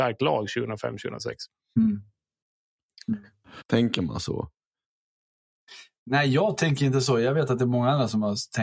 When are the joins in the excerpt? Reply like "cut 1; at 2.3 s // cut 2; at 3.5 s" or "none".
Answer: cut 1; at 3.6 s